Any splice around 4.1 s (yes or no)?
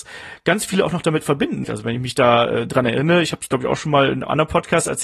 no